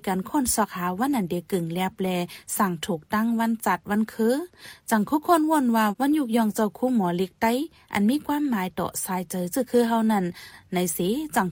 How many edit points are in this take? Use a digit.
0